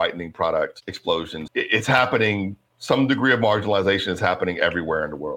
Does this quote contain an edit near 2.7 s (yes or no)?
no